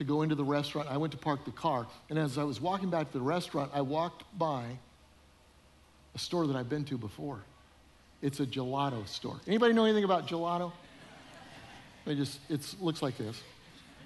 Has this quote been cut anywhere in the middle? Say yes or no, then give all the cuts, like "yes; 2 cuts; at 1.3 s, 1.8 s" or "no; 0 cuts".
no; 0 cuts